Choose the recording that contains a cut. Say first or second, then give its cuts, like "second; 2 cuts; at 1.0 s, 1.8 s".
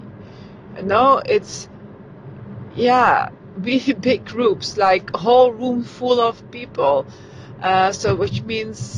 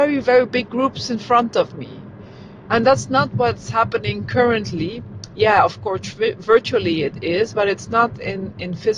second; 1 cut; at 2.7 s